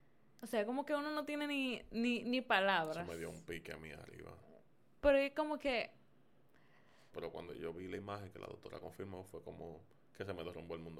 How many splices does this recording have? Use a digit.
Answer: 1